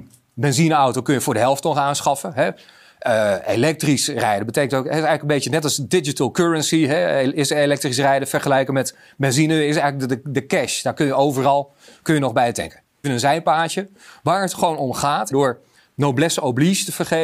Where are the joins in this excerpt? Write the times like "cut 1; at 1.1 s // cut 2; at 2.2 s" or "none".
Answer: cut 1; at 13.0 s // cut 2; at 15.3 s